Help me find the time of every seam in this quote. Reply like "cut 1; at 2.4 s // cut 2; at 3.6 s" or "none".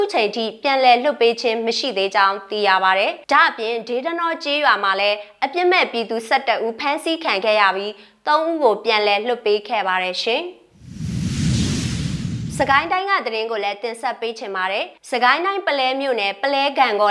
cut 1; at 3.2 s // cut 2; at 15.0 s